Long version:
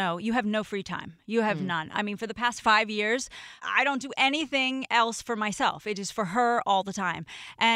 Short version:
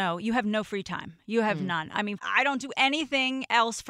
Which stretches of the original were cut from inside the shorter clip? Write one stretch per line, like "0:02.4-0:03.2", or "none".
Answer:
0:02.2-0:03.6